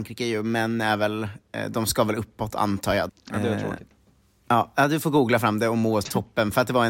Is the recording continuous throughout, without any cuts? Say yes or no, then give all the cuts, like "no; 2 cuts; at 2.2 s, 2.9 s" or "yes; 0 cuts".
no; 1 cut; at 3.1 s